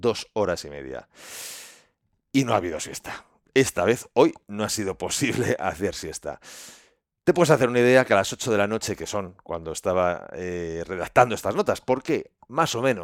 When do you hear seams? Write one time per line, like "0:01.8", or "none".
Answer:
none